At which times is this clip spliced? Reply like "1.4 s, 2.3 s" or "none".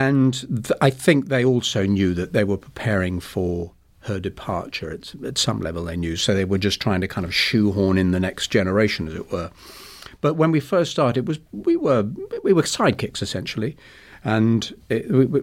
none